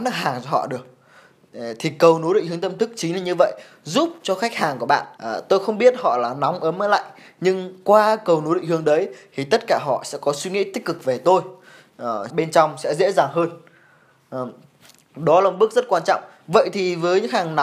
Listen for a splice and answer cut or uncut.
cut